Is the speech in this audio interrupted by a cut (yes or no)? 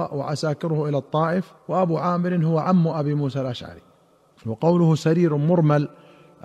yes